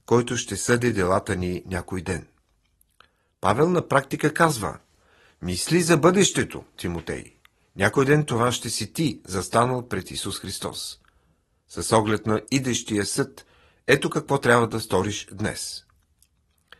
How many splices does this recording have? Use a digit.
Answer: 0